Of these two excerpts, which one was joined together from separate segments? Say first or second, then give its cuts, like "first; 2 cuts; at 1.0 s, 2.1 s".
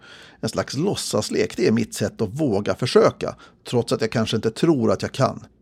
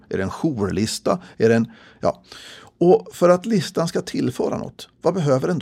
second; 1 cut; at 1.3 s